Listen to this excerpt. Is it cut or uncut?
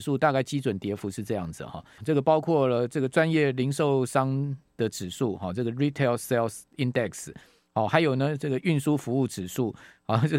cut